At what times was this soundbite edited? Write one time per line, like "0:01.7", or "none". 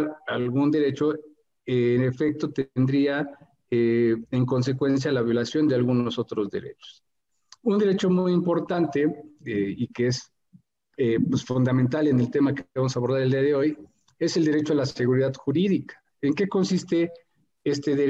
none